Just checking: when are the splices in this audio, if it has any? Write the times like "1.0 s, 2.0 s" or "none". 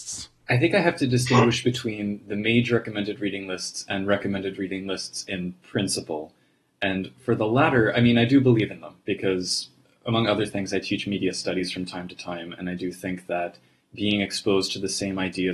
none